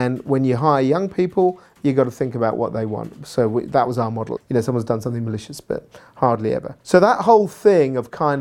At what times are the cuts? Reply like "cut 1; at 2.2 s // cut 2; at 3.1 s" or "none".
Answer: cut 1; at 4.4 s // cut 2; at 6.8 s